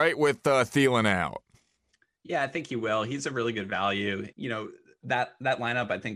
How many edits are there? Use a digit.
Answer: 1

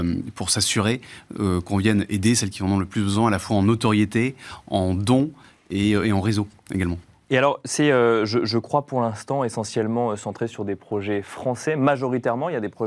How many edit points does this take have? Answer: 0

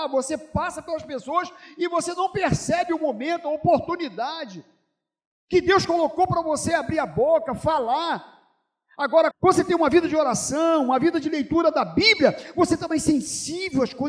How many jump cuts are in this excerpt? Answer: 1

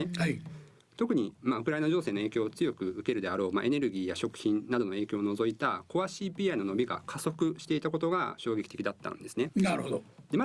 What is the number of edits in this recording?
1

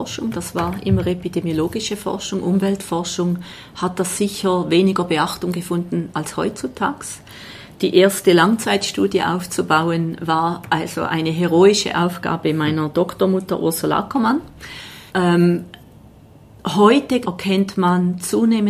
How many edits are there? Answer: 2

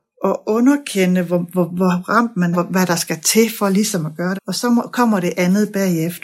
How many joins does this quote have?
2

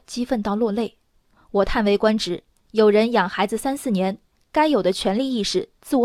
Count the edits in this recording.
0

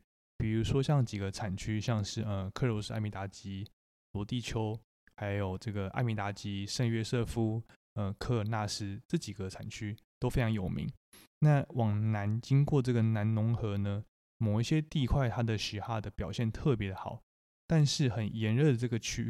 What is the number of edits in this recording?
0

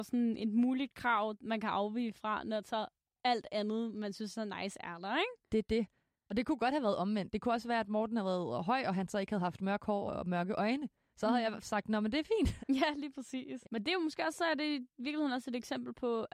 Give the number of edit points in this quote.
3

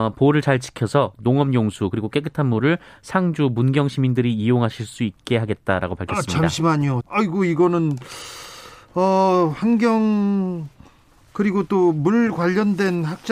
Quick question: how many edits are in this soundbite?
1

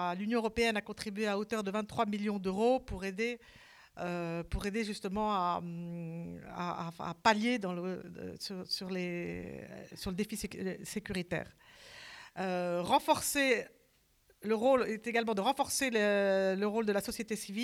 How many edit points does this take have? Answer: 0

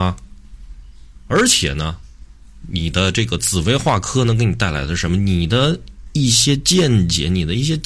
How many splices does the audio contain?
0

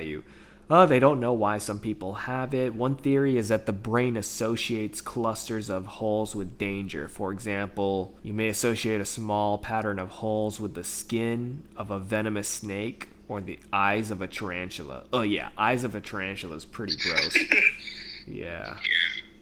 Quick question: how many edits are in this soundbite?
1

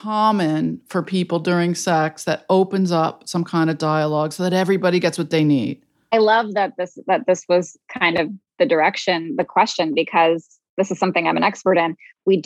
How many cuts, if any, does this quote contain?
0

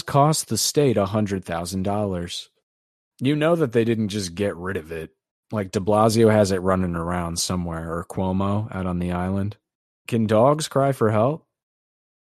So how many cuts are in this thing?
1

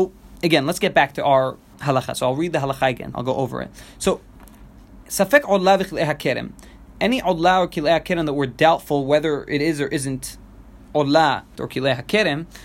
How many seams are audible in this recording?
2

